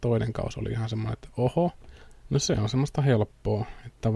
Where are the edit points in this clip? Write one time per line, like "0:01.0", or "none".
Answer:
0:02.2